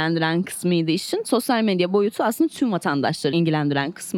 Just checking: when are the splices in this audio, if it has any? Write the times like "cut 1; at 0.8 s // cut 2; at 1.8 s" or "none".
none